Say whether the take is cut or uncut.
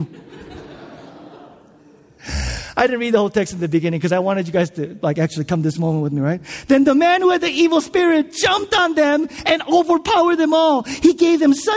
uncut